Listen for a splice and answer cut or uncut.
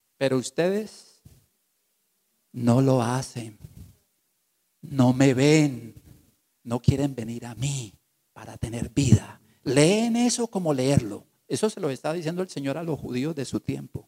uncut